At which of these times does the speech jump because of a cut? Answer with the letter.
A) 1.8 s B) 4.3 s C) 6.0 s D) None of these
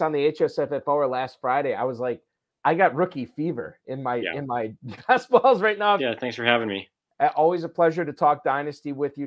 C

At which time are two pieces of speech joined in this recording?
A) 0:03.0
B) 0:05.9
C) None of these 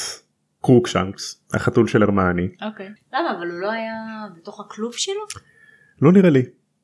A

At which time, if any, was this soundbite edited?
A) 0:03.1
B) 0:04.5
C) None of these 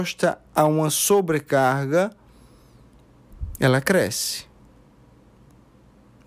C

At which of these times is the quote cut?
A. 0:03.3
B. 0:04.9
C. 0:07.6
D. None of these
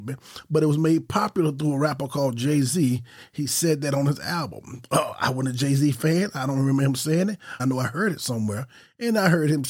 C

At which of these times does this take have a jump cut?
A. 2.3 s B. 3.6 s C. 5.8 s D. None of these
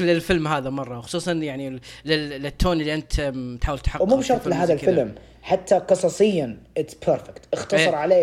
B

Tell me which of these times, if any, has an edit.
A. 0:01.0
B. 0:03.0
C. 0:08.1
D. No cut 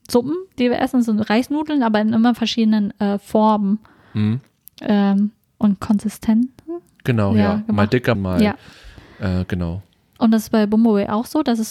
C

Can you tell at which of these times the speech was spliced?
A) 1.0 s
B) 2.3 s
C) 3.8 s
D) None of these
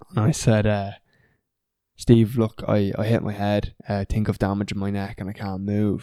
C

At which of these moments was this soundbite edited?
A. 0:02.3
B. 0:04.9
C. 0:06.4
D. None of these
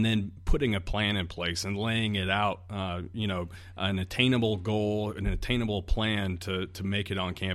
D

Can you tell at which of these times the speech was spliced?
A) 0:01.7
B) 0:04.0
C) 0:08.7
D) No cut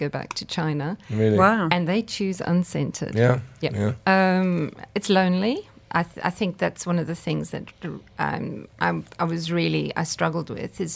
B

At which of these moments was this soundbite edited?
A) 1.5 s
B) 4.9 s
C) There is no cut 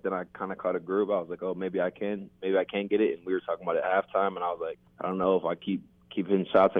B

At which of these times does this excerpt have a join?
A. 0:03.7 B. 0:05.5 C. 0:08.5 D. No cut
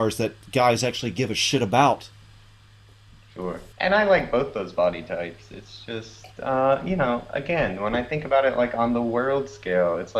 A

